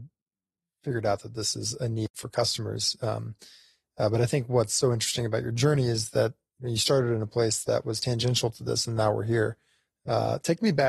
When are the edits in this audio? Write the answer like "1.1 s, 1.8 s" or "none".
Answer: none